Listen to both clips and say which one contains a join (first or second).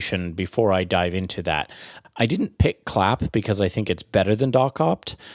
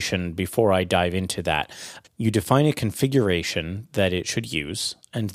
second